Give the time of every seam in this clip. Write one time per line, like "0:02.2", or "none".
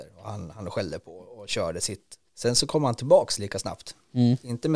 0:02.3